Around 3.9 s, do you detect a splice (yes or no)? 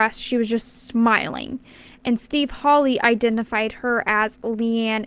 no